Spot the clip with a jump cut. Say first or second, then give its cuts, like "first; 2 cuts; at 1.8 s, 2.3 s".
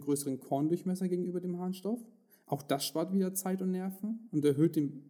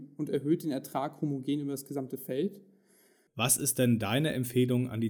second; 1 cut; at 3.3 s